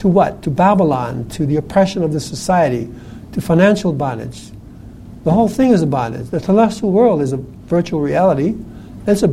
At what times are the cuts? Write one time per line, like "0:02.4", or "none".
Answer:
none